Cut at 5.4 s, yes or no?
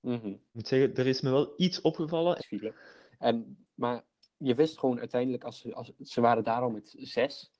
no